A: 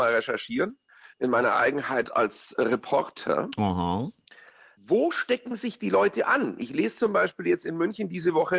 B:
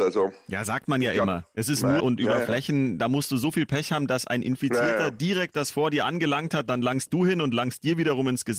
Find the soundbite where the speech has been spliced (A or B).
B